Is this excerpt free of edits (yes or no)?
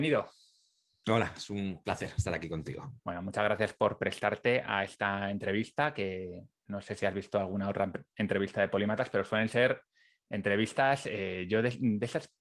no